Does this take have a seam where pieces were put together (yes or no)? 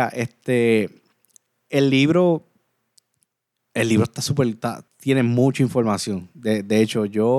yes